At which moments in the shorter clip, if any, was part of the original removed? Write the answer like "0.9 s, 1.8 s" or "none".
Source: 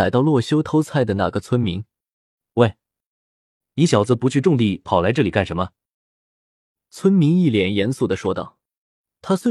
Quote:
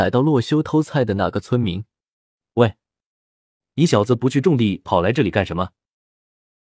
none